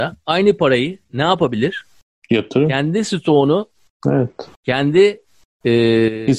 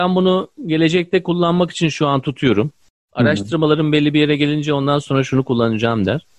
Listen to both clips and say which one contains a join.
first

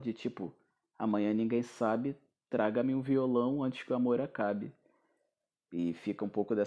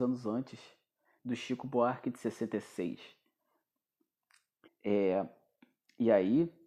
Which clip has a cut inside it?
second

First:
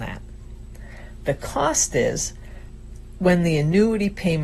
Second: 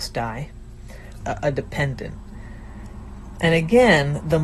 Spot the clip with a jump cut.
second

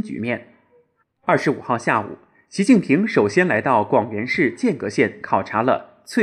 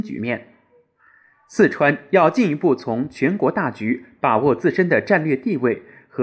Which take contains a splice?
first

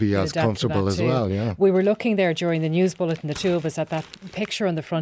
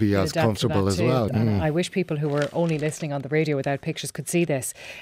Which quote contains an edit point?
second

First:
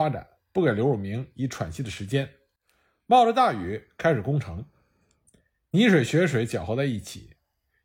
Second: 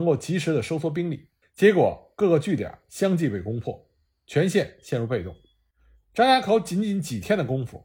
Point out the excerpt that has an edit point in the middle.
second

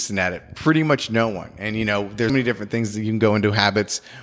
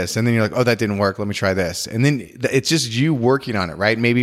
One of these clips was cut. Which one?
first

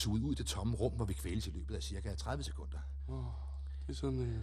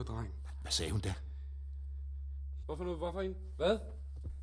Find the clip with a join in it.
second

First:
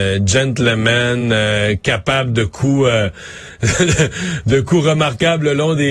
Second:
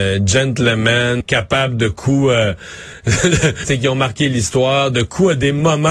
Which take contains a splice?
second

